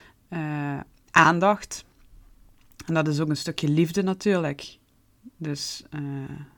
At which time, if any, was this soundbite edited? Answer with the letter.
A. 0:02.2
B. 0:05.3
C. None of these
C